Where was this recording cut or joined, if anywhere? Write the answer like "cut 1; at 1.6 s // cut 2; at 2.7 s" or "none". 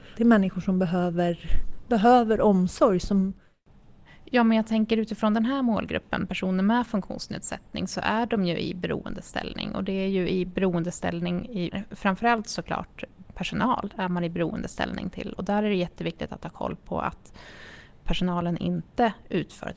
cut 1; at 11.7 s